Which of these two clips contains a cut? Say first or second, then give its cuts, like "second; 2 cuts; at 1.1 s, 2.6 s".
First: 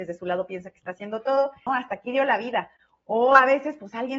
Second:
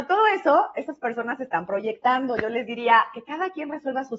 first; 1 cut; at 1.7 s